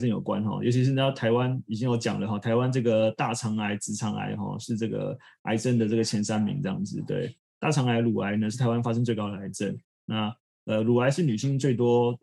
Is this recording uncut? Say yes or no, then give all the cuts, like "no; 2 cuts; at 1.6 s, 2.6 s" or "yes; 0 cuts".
yes; 0 cuts